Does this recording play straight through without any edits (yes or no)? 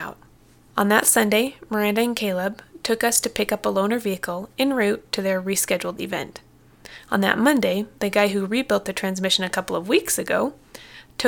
yes